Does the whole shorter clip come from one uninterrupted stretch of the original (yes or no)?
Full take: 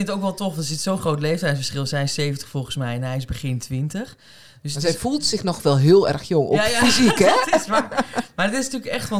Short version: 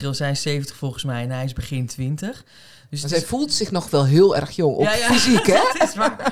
yes